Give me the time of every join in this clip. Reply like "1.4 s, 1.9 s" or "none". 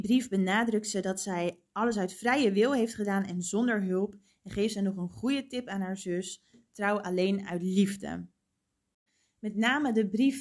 none